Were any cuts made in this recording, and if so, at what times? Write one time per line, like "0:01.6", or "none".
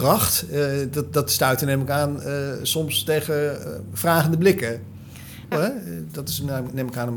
0:05.5